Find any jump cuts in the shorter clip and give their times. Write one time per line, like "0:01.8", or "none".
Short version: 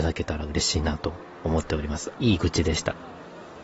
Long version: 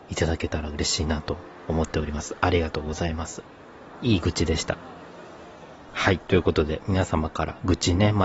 0:02.2